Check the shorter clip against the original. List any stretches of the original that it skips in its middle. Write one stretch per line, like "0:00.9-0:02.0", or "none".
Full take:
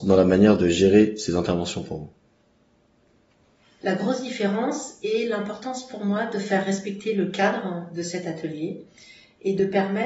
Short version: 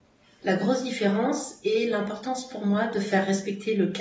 none